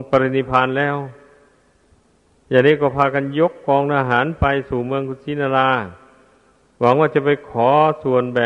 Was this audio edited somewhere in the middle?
no; 0 cuts

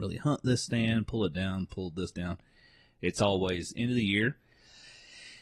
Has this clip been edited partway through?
no; 0 cuts

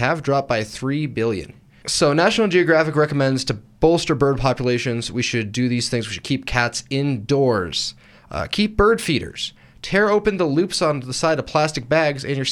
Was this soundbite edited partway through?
yes; 2 cuts; at 1.8 s, 8.1 s

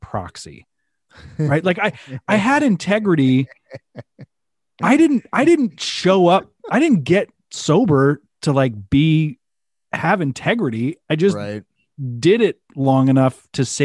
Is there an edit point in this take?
no; 0 cuts

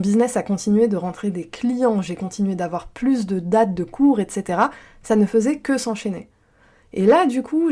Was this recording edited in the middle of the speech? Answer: no; 0 cuts

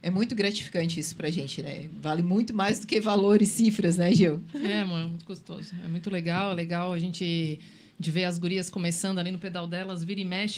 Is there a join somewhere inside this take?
no; 0 cuts

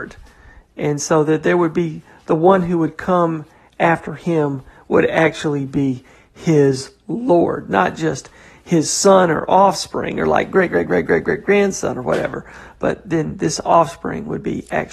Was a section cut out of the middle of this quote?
no; 0 cuts

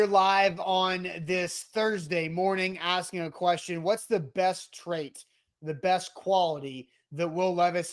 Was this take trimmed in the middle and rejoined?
no; 0 cuts

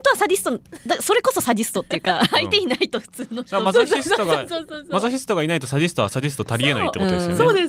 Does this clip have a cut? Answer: no; 0 cuts

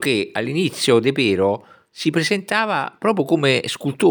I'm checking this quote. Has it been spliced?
no; 0 cuts

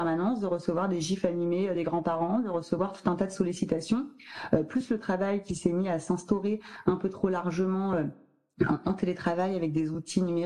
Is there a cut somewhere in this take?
no; 0 cuts

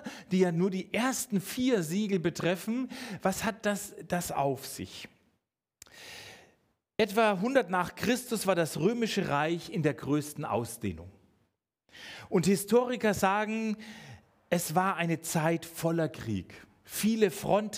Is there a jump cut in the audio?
no; 0 cuts

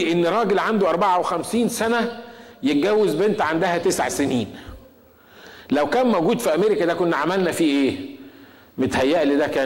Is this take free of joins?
yes; 0 cuts

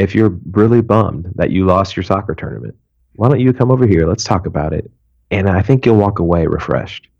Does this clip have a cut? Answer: no; 0 cuts

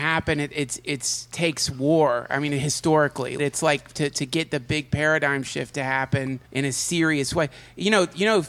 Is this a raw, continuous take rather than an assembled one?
no; 2 cuts; at 3.4 s, 6.4 s

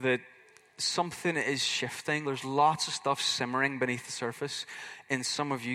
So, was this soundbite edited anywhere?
yes; 1 cut; at 2.2 s

